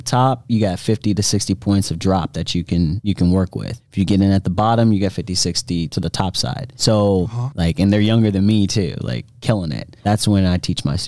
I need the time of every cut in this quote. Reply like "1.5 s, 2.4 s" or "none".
7.5 s, 10.0 s